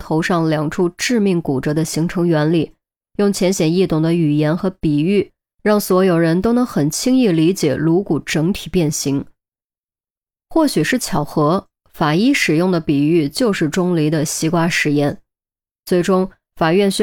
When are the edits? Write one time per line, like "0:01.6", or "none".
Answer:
none